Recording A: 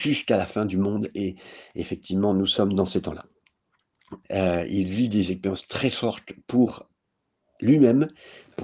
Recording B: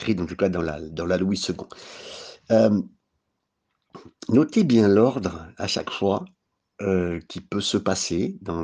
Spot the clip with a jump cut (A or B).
A